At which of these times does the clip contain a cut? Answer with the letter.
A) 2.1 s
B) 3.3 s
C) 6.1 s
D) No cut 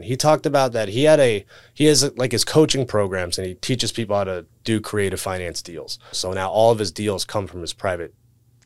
C